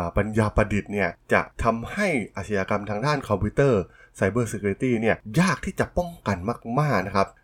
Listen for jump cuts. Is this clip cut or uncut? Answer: uncut